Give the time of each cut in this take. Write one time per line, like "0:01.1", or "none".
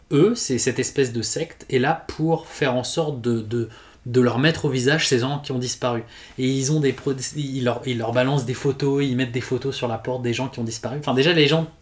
none

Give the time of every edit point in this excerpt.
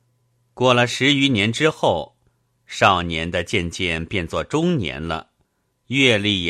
none

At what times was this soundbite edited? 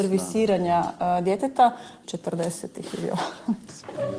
0:02.0

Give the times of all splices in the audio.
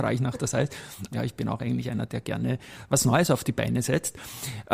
0:01.1

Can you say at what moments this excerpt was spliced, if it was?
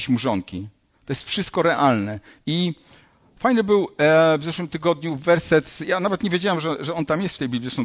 none

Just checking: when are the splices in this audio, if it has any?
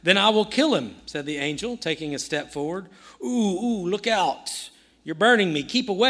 none

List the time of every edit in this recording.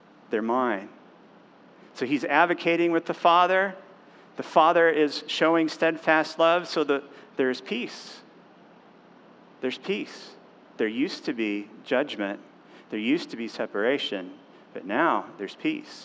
none

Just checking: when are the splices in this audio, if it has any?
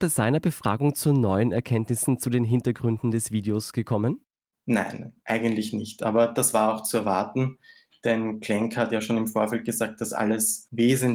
none

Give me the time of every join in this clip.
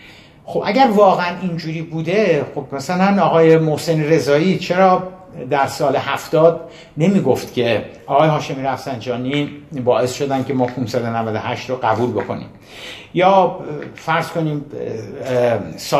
none

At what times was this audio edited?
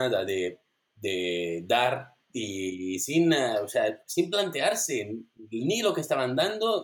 none

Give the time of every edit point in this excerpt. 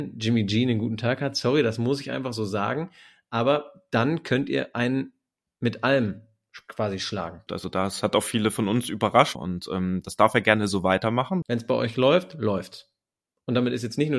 0:07.5
0:09.3
0:11.4

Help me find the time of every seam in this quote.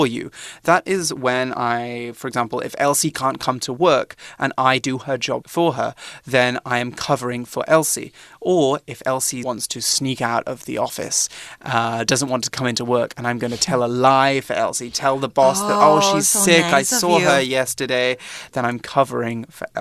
none

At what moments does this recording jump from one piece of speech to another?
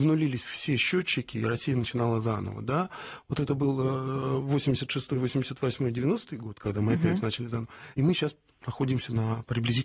none

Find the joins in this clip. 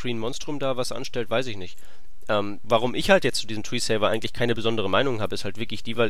0:02.6

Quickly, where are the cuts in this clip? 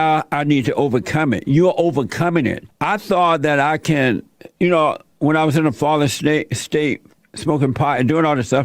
0:02.7

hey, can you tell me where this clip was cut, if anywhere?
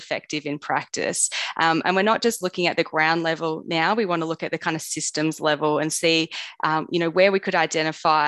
none

